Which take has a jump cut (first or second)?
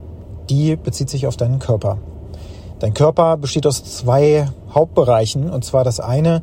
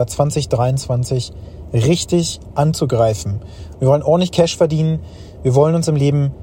second